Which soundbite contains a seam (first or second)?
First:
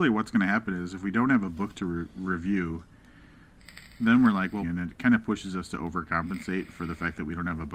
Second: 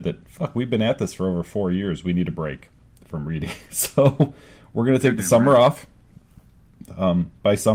first